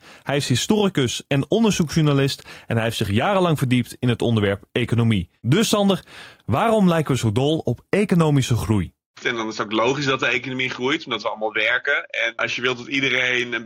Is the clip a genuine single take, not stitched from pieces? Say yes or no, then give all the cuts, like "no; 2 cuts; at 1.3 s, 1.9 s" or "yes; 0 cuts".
no; 2 cuts; at 9.2 s, 12.4 s